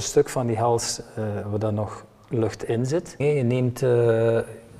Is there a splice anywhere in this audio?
yes; 1 cut; at 3.2 s

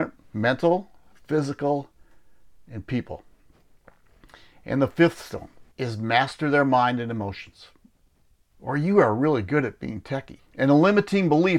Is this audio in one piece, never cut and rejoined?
no; 3 cuts; at 5.7 s, 8.5 s, 10.4 s

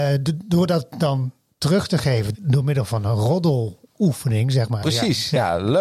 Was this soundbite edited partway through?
yes; 2 cuts; at 2.3 s, 4.8 s

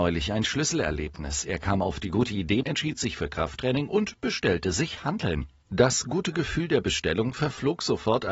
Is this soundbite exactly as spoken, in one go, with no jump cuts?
no; 1 cut; at 2.6 s

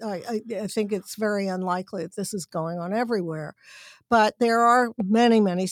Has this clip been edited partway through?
no; 0 cuts

